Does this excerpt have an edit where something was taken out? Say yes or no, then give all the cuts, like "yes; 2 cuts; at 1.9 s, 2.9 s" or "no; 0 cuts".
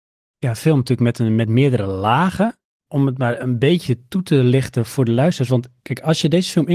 yes; 1 cut; at 2.9 s